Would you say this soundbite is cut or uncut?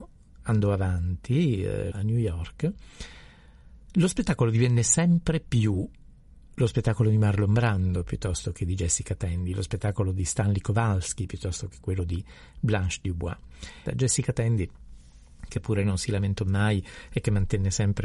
cut